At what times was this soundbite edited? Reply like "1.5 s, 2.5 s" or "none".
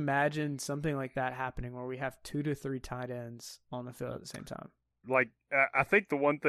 5.0 s